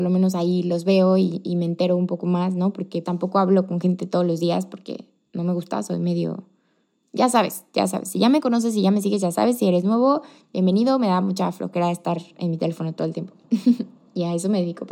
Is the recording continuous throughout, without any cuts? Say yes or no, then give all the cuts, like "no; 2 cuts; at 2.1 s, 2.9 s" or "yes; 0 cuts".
no; 1 cut; at 3.0 s